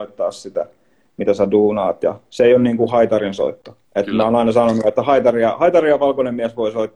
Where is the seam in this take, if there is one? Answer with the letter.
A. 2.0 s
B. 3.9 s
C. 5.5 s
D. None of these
B